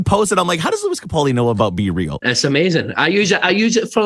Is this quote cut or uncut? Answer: cut